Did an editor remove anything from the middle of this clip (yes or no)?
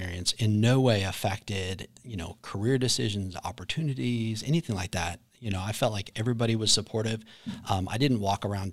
no